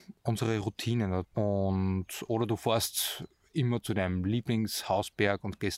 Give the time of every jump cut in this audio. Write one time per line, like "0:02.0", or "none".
0:01.2